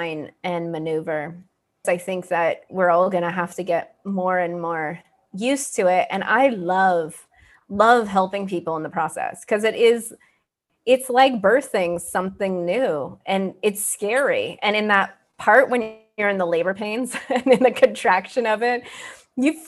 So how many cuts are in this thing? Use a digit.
1